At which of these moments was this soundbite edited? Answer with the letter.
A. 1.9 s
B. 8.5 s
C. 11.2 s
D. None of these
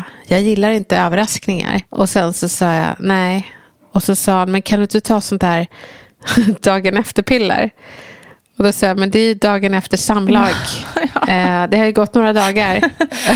A